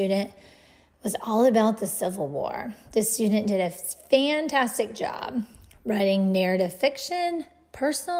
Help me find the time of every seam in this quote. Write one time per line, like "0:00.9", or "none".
none